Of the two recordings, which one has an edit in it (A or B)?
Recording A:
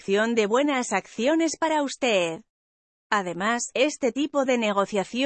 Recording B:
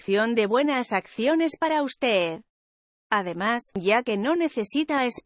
B